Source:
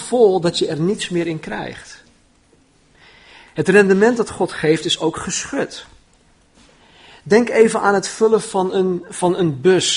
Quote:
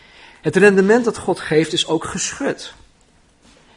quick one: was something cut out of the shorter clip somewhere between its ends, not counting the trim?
no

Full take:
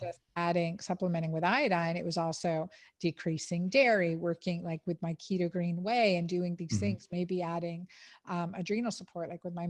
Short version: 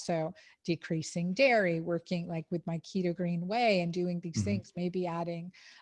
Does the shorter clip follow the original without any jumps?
yes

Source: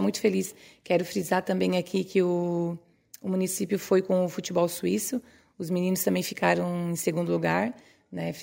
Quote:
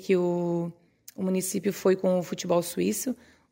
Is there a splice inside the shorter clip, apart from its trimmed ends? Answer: no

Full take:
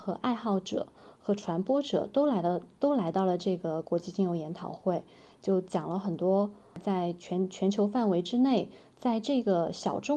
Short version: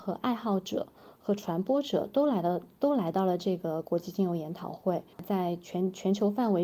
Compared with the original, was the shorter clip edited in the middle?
yes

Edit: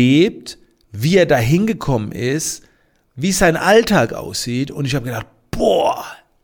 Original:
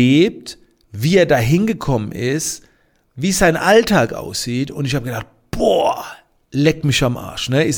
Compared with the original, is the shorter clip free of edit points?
yes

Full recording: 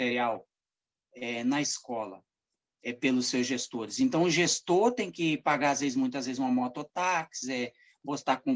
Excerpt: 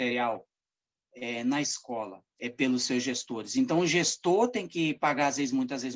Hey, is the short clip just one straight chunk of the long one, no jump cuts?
no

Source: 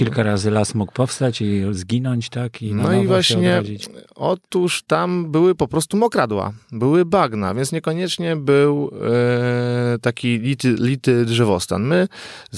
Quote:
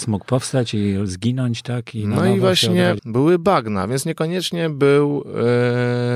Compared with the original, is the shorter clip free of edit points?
no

